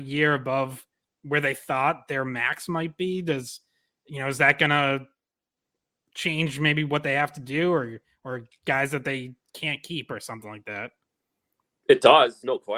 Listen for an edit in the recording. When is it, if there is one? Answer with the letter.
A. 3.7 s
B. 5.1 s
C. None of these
C